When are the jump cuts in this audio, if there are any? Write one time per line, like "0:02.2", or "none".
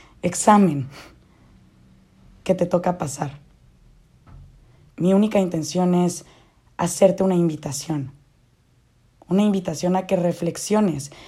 0:04.9